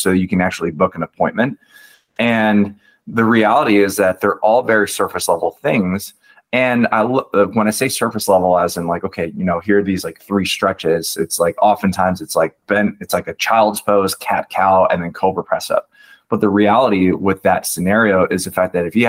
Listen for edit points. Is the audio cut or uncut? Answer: uncut